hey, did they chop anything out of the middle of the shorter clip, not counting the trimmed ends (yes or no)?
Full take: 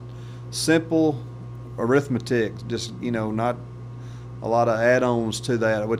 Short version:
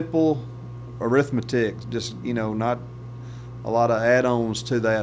no